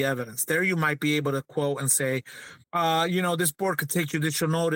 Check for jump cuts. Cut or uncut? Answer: cut